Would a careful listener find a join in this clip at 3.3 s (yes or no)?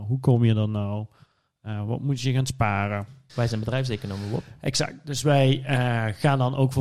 yes